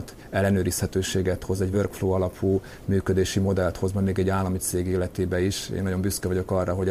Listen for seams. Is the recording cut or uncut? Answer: uncut